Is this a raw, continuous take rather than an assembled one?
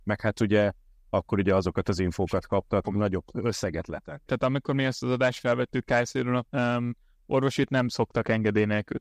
no; 3 cuts; at 2.8 s, 4.3 s, 6.4 s

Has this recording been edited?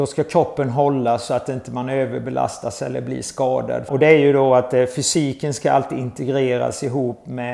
yes; 1 cut; at 3.9 s

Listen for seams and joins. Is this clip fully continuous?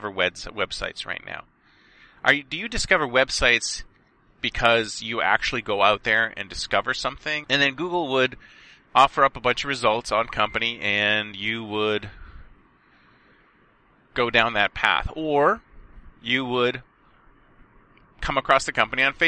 no; 1 cut; at 7.4 s

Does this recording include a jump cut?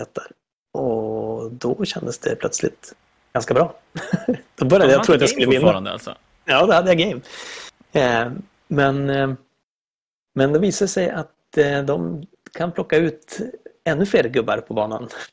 no; 0 cuts

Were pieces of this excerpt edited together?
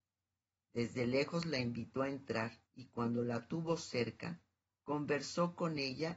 yes; 1 cut; at 2.7 s

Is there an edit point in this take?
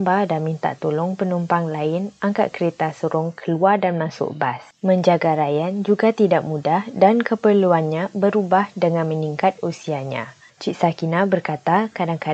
yes; 1 cut; at 10.5 s

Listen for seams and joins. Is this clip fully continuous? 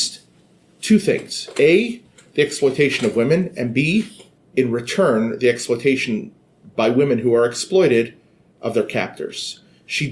yes; 0 cuts

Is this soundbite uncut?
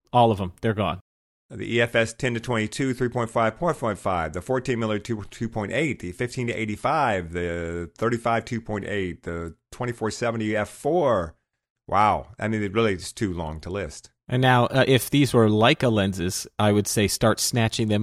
yes; 0 cuts

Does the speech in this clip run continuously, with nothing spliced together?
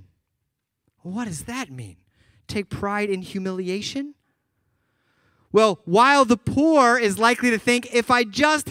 yes; 0 cuts

